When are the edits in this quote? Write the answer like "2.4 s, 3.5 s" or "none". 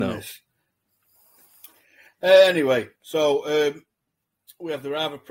none